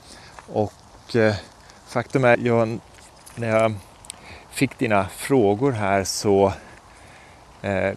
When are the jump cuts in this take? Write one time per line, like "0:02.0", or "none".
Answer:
0:02.3